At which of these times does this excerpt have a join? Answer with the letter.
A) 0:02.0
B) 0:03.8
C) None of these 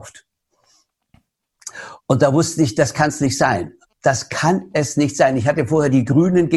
B